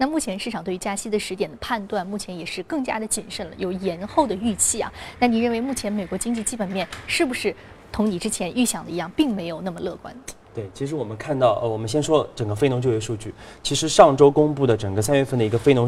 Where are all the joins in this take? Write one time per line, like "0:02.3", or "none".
none